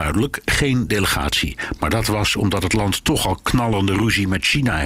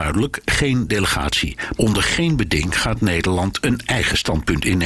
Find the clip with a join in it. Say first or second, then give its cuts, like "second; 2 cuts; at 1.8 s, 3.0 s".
second; 1 cut; at 1.8 s